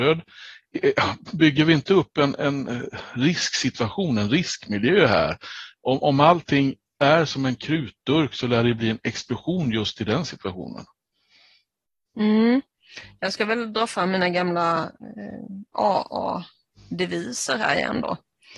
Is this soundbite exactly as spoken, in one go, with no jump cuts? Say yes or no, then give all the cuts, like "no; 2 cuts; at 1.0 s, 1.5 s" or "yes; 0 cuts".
yes; 0 cuts